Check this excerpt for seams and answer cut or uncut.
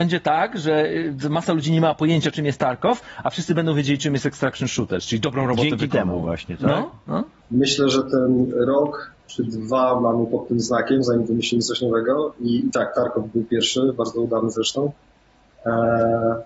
uncut